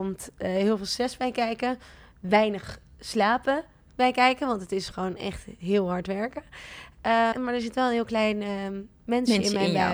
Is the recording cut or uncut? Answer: cut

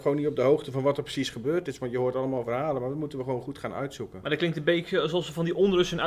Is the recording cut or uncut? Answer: uncut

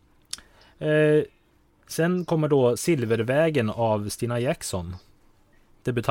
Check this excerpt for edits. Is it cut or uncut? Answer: uncut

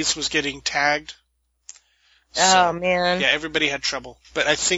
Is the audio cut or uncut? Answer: uncut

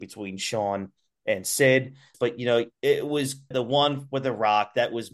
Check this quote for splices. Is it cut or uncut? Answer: cut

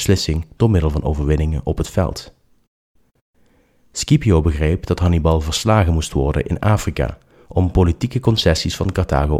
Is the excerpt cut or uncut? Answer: uncut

